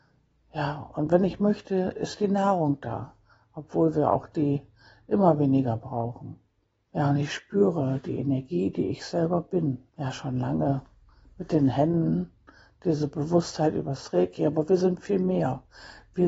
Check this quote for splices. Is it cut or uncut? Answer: cut